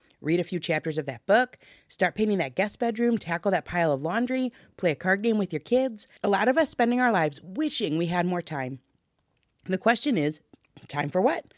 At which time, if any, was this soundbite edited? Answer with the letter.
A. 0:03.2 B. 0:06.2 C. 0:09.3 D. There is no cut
B